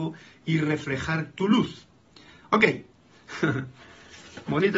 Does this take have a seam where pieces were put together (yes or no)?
no